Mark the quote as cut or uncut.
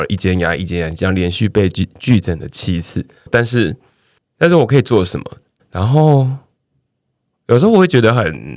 cut